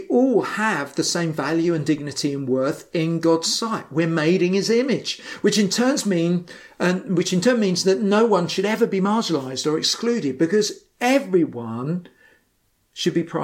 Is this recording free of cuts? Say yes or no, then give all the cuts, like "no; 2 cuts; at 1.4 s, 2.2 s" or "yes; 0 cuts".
yes; 0 cuts